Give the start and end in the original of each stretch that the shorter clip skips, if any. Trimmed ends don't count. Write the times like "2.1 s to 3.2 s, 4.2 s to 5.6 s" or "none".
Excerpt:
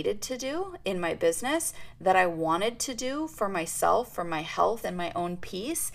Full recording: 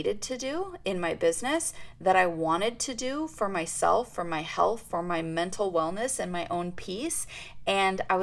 4.8 s to 6.2 s